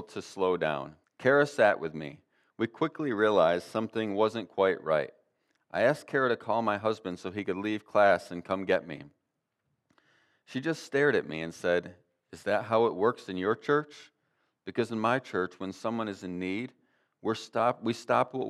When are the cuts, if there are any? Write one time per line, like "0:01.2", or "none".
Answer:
0:01.0